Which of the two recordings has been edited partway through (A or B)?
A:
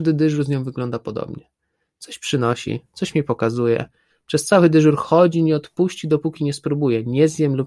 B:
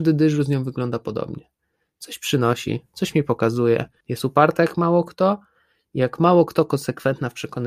B